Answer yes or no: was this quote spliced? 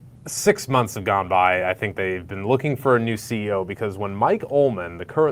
no